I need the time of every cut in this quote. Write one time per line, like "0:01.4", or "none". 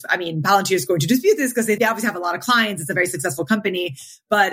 0:01.8

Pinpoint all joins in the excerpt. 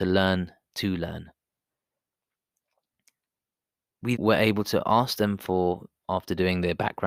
0:04.2

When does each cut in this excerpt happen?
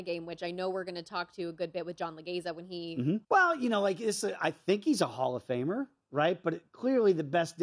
0:03.2

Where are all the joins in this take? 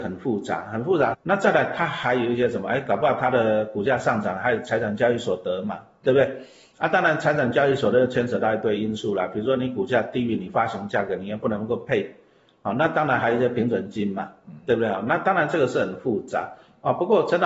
0:01.1

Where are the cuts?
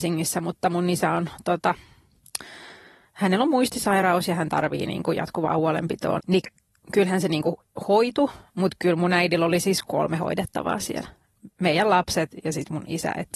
0:06.2

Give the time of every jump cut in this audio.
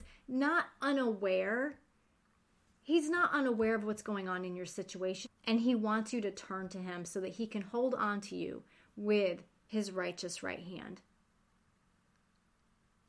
0:05.3

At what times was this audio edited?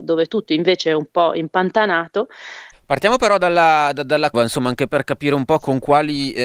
0:02.7
0:04.3

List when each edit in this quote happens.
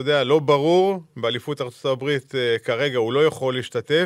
none

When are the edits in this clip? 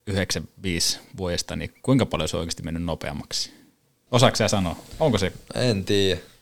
0:04.1

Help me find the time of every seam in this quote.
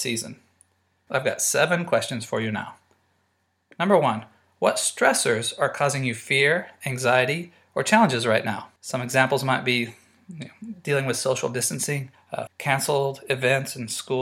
0:01.1
0:08.8
0:12.5

